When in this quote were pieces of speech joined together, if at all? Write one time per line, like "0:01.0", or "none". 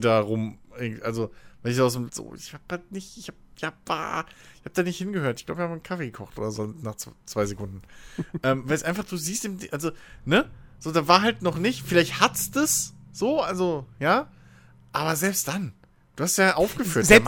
0:02.1